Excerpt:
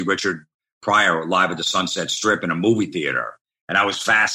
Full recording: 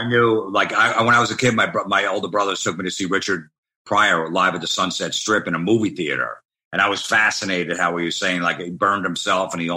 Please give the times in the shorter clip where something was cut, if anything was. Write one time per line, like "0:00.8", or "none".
none